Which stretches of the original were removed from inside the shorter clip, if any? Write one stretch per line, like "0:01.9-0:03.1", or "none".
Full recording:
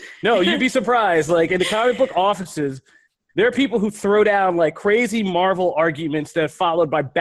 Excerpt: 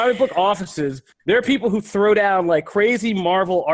0:02.9-0:03.2

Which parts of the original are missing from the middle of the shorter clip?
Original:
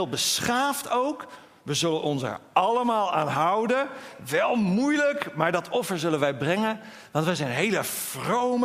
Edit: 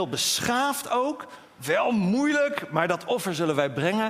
0:01.6-0:04.2

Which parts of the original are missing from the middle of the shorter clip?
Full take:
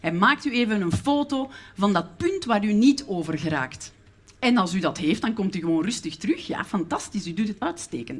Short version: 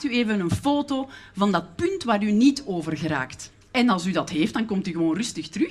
0:04.0-0:04.3

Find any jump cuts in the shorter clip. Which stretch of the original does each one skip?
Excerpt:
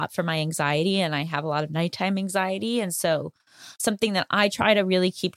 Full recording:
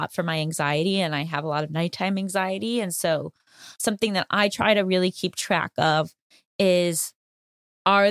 none

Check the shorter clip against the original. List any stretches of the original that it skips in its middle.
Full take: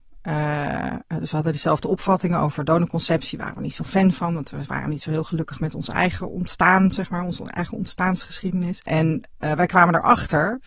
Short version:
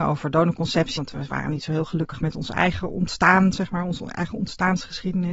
0:03.3-0:04.4

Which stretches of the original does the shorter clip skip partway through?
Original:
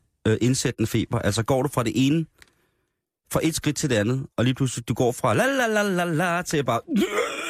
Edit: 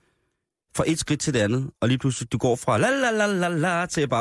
none

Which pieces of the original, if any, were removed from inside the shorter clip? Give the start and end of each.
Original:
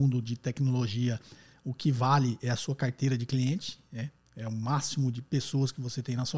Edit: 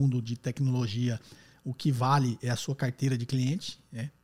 none

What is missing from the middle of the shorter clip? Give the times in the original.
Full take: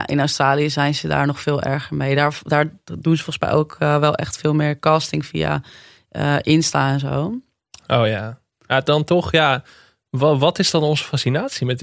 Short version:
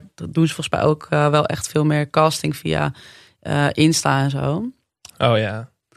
none

